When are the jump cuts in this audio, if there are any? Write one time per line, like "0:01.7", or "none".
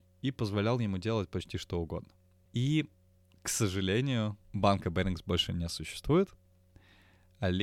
0:02.5
0:04.4